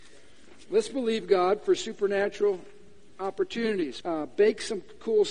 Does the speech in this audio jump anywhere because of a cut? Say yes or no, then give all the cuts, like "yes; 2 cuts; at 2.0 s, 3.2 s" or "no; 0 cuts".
yes; 1 cut; at 4.0 s